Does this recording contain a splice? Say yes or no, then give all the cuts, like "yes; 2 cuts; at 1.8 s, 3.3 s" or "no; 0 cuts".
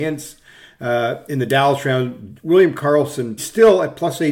yes; 1 cut; at 3.4 s